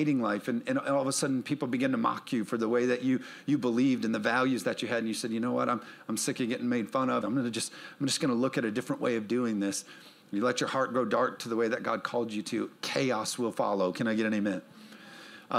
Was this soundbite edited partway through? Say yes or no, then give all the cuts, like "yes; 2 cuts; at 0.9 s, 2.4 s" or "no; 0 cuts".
yes; 1 cut; at 7.2 s